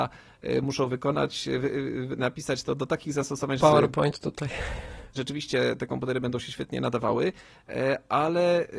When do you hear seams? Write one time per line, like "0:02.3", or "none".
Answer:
0:03.6
0:05.1

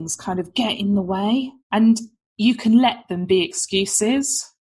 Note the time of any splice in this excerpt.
0:01.6

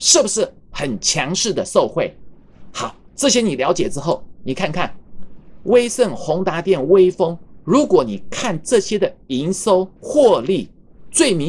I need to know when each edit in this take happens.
0:10.0

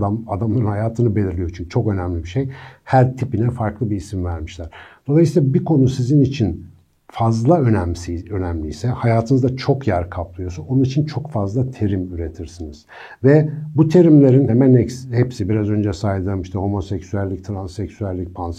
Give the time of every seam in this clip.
0:14.5

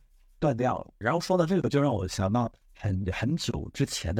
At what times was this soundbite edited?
0:01.0
0:02.6

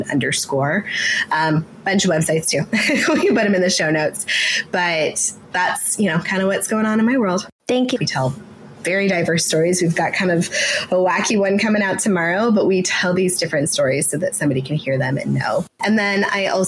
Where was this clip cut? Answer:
0:08.0

